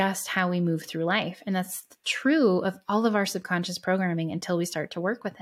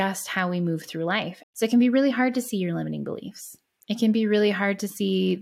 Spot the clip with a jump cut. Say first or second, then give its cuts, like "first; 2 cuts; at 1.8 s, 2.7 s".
second; 1 cut; at 1.4 s